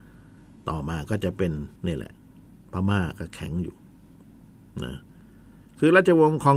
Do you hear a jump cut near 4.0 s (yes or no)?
no